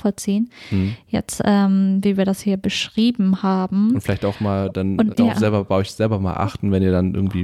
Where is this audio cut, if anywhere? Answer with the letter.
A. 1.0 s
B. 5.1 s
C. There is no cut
B